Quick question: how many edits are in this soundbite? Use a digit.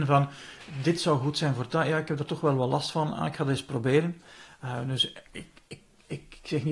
1